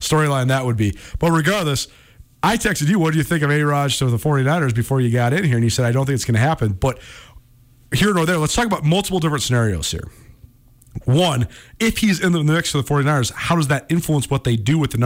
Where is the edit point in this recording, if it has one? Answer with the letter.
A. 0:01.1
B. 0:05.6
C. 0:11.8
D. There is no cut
C